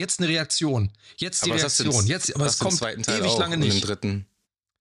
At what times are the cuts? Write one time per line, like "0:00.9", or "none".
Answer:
none